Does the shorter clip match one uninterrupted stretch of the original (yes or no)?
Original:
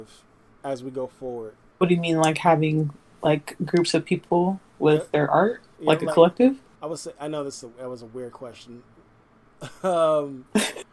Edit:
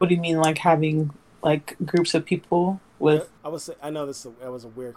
no